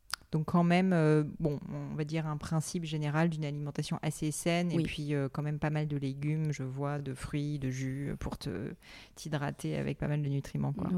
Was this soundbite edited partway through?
no; 0 cuts

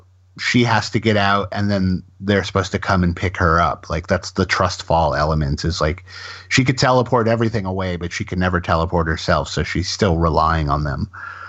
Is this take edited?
no; 0 cuts

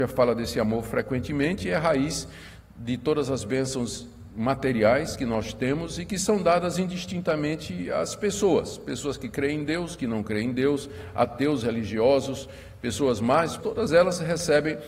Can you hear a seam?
yes; 1 cut; at 13.6 s

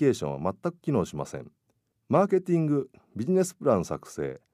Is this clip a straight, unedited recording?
no; 1 cut; at 1.9 s

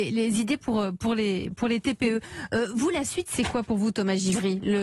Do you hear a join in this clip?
no; 0 cuts

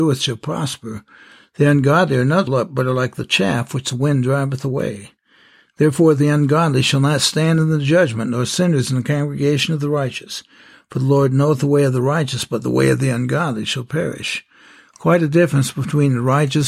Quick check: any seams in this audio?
yes; 1 cut; at 2.5 s

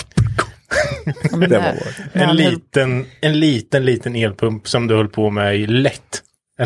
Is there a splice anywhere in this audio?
no; 0 cuts

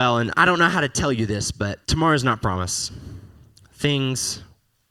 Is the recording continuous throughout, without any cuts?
no; 1 cut; at 1.8 s

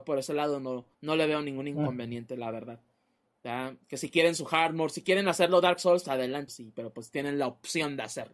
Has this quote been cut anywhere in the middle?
yes; 2 cuts; at 0.9 s, 6.5 s

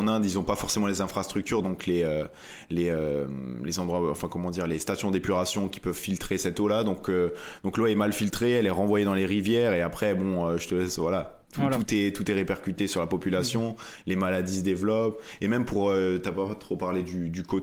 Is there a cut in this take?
no; 0 cuts

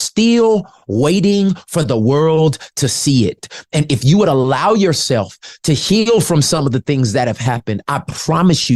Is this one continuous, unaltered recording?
yes; 0 cuts

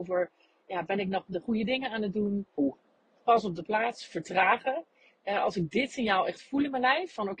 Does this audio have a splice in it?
yes; 1 cut; at 2.6 s

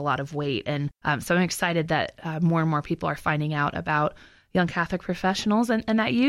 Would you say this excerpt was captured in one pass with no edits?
yes; 0 cuts

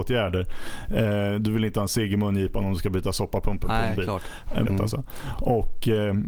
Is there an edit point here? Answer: yes; 1 cut; at 4.7 s

